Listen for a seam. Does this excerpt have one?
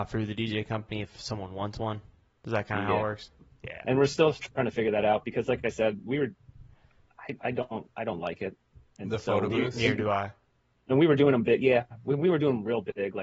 no; 0 cuts

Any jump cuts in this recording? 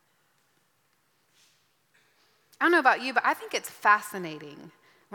no; 0 cuts

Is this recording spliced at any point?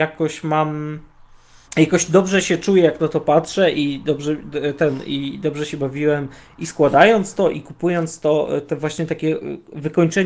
yes; 1 cut; at 1.6 s

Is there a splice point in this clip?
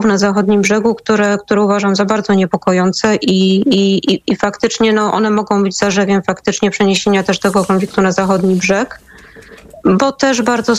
no; 0 cuts

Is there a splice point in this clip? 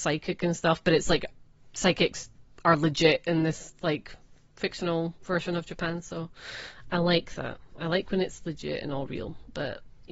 no; 0 cuts

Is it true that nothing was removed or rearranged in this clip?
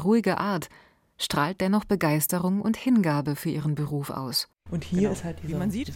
no; 1 cut; at 4.7 s

